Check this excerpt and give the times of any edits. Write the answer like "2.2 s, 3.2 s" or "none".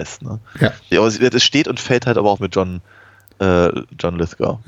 0.9 s, 2.4 s

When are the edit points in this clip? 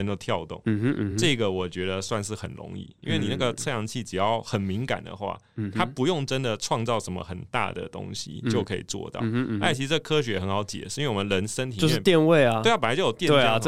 none

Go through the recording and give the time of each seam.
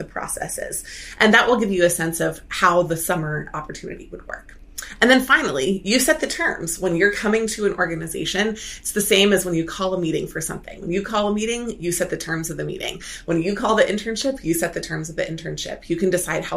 none

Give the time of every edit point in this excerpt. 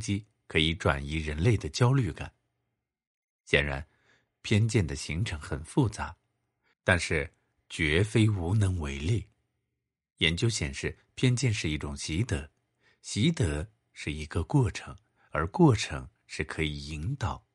6.7 s

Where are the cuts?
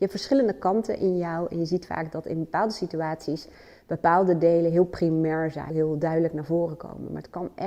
5.7 s

